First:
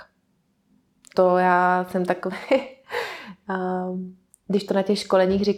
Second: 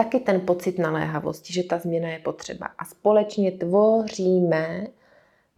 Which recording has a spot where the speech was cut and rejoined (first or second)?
first